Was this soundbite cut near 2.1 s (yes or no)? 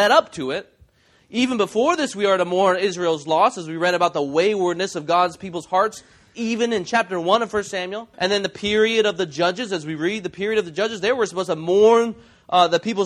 no